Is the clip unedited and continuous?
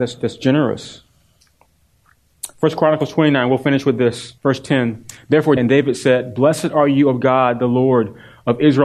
no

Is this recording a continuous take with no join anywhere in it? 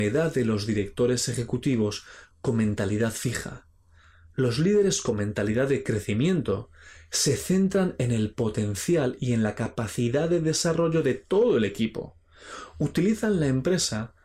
yes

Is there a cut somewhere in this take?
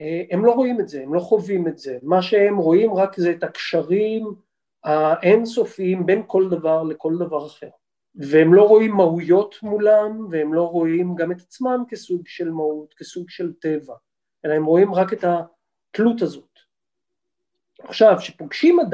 no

